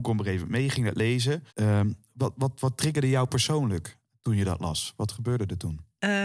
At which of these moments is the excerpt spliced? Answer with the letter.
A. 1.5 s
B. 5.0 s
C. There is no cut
A